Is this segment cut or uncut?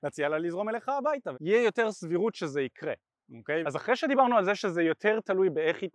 cut